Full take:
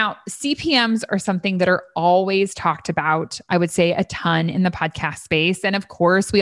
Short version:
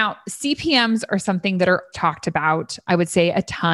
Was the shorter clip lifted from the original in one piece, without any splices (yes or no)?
no